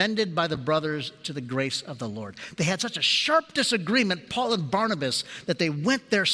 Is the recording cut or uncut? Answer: uncut